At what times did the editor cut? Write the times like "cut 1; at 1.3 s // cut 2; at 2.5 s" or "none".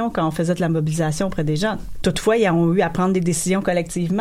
cut 1; at 1.9 s

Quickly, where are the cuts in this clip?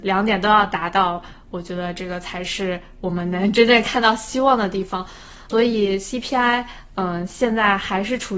none

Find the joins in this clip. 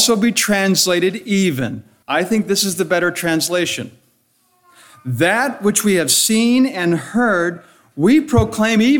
cut 1; at 2.0 s

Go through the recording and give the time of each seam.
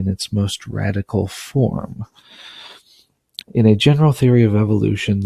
cut 1; at 3.4 s

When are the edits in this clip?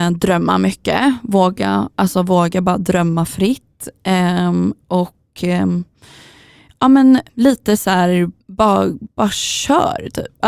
cut 1; at 7.3 s // cut 2; at 8.4 s

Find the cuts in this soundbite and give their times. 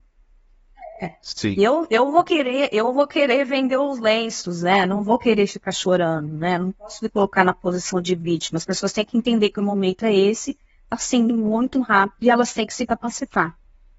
none

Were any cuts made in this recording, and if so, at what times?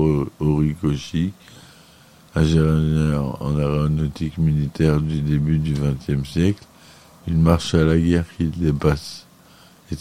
cut 1; at 7.2 s

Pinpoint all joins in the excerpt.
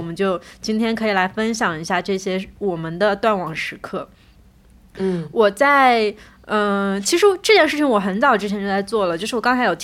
none

